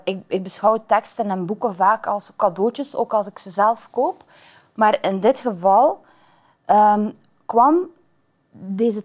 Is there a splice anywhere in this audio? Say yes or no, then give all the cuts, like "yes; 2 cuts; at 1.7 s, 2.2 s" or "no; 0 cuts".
no; 0 cuts